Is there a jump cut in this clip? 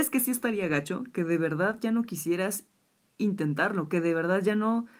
no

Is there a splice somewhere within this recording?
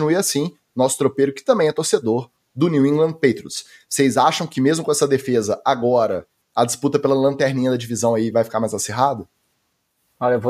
no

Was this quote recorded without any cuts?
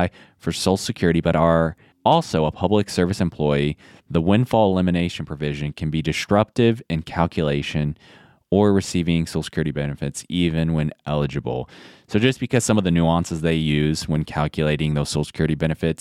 yes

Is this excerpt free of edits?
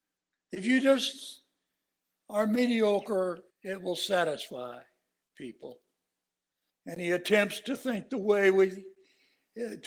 no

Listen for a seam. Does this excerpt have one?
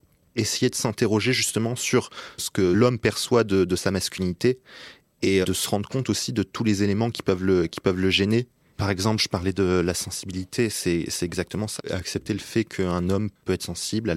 yes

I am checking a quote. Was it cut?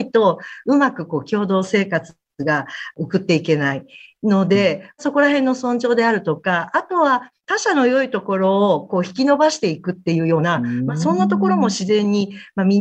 no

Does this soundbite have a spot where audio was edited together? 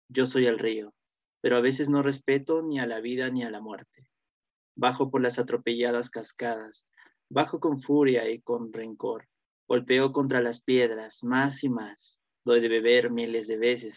yes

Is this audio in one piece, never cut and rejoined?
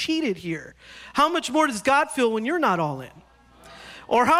yes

